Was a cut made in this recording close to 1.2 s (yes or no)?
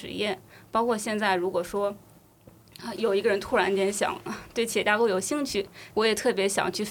no